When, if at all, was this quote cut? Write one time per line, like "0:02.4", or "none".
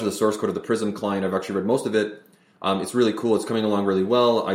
none